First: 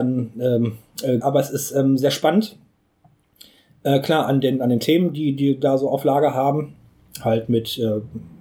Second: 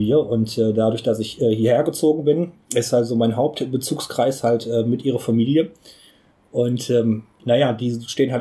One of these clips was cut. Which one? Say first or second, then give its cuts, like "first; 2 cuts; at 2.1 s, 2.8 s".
first; 1 cut; at 1.2 s